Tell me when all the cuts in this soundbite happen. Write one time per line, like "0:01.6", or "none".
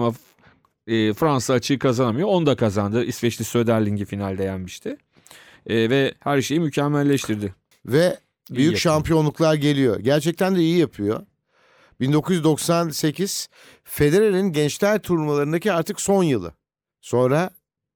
0:07.7